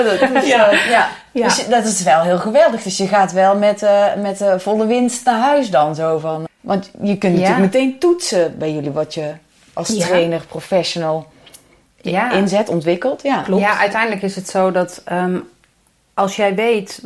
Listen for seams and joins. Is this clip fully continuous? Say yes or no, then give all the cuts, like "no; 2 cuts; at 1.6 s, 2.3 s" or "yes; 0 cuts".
no; 1 cut; at 6.5 s